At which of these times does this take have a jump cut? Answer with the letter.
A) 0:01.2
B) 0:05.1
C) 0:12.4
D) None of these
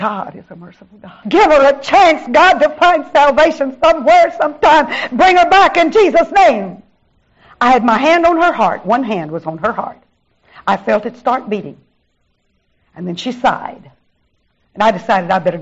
A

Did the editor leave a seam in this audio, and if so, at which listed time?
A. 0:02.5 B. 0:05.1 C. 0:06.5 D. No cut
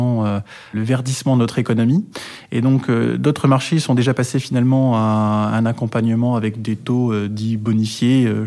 D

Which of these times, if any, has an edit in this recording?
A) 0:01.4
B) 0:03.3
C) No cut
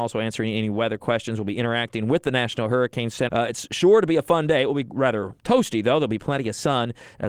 B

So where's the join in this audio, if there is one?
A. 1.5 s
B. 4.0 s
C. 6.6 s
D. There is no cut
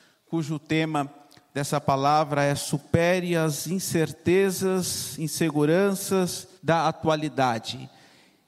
C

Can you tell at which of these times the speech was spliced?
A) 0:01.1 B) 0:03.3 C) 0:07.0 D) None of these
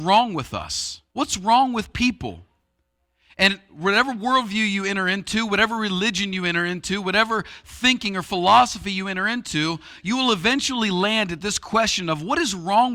A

